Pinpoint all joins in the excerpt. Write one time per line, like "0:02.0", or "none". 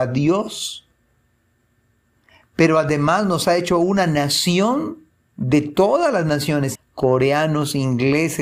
0:06.7